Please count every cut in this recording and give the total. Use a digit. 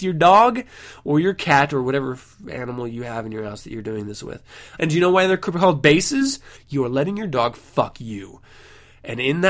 2